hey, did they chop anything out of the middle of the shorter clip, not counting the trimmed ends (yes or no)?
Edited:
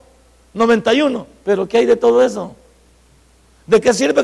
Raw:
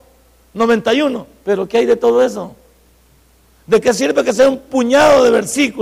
no